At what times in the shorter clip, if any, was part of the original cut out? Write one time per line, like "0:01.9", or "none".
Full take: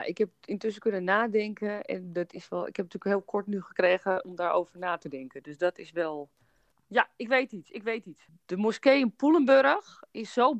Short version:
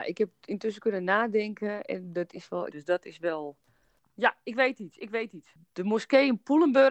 0:02.7